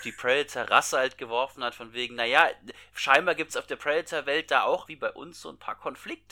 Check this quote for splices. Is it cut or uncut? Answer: cut